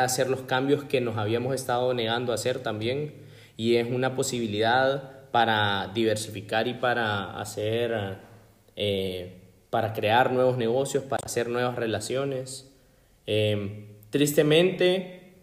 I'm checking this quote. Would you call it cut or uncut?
uncut